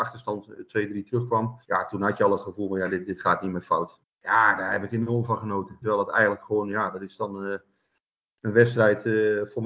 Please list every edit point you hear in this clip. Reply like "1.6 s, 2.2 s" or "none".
1.6 s, 4.0 s, 5.8 s